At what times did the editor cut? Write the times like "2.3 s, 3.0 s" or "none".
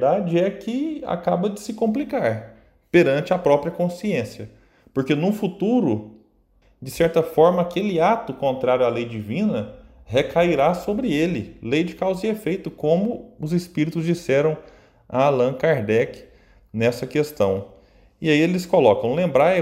6.6 s